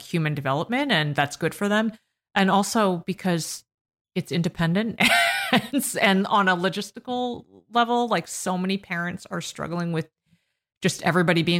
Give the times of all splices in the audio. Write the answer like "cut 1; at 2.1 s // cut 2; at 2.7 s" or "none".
none